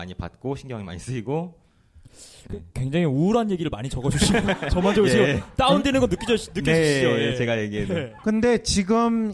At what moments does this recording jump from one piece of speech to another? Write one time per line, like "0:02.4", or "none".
none